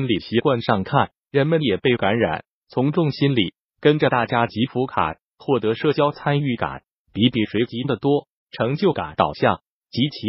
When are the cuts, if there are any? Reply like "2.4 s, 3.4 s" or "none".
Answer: 7.0 s, 8.4 s